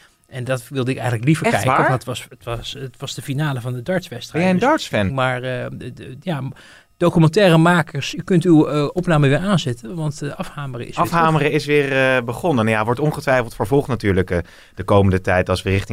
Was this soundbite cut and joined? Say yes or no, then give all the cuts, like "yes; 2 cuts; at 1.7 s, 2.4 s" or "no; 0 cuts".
yes; 1 cut; at 5.1 s